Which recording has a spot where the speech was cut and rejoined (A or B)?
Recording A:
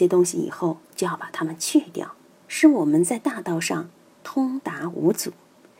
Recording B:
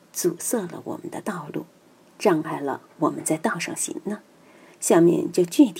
B